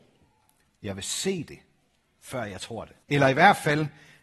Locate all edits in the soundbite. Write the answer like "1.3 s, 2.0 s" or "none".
3.0 s